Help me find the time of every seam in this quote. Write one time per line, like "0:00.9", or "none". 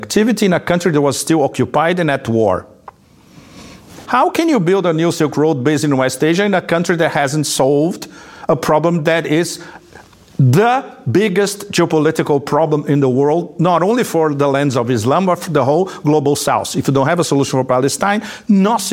0:04.0